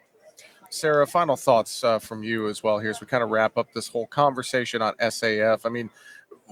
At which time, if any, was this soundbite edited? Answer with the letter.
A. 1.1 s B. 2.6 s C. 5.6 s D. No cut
D